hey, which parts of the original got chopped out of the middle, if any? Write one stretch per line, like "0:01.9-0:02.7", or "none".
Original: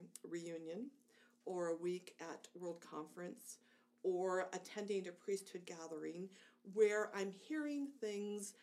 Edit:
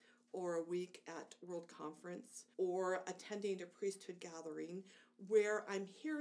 0:03.7-0:04.0